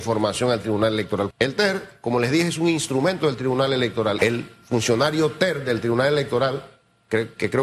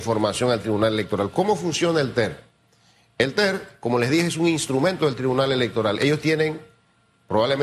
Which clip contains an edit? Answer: first; 2 cuts; at 1.3 s, 4.2 s

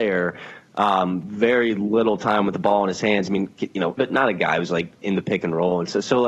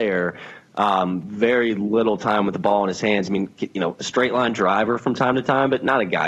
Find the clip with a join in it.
first; 1 cut; at 4.0 s

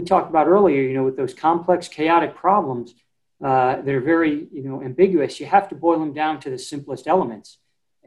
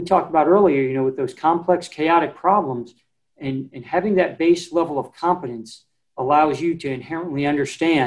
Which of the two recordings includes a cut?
second; 1 cut; at 3.3 s

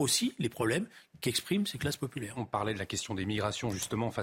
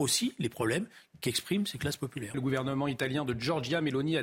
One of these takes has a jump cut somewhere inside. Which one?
second; 1 cut; at 2.3 s

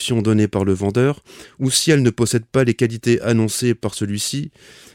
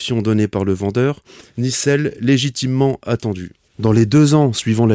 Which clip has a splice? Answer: second; 1 cut; at 1.4 s

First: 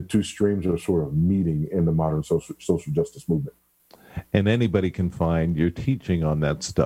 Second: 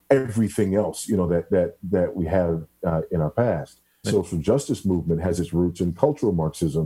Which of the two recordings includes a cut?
second; 1 cut; at 4.0 s

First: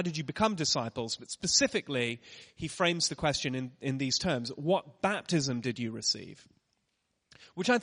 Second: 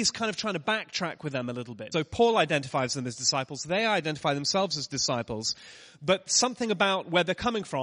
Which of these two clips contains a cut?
second; 1 cut; at 1.9 s

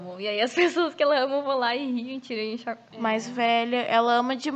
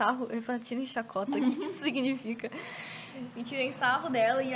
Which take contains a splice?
first; 1 cut; at 2.9 s

